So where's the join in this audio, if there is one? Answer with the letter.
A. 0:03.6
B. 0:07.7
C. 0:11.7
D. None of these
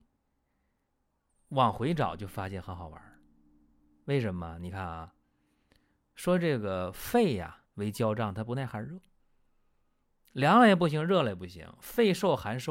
B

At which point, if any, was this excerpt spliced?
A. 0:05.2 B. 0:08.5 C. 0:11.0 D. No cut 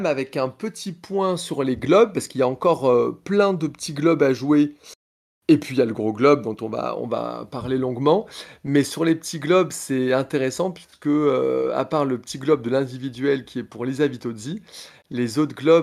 D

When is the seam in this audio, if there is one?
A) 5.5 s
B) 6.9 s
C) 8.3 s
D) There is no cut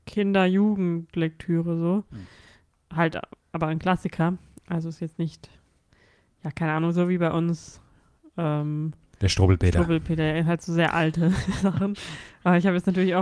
D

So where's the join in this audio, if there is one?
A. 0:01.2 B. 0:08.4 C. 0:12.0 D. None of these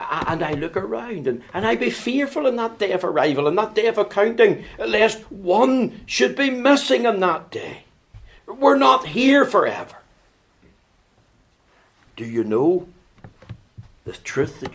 B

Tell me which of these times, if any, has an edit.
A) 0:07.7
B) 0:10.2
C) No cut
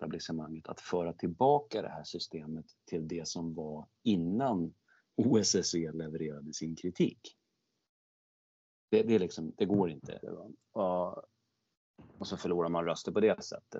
B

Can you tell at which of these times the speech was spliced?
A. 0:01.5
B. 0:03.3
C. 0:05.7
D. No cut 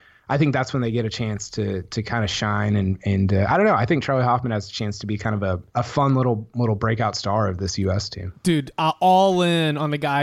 C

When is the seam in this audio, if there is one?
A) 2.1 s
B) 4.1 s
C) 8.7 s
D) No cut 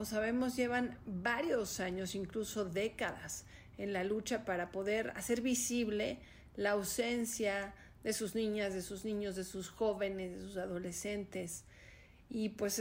D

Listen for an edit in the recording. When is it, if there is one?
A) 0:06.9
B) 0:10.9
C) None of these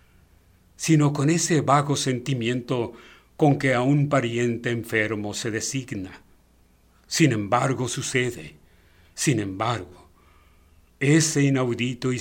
B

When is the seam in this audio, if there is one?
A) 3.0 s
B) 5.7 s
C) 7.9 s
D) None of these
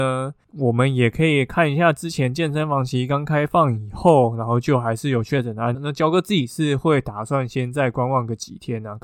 B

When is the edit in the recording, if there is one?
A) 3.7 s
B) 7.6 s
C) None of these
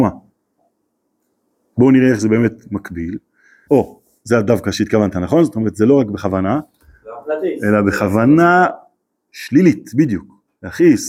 A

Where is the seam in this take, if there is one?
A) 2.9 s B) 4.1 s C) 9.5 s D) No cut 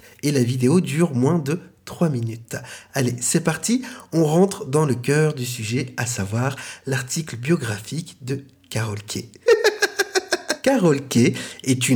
C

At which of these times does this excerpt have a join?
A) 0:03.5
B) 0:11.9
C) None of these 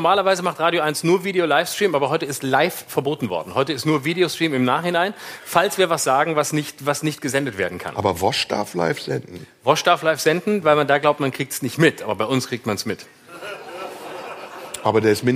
C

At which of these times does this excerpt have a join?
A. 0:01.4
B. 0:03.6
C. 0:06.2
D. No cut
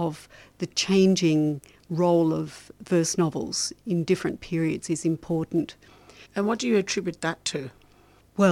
C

